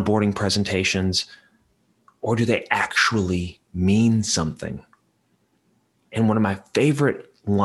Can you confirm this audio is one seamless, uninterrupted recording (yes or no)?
yes